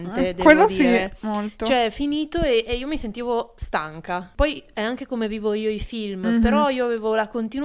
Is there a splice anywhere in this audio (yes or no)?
no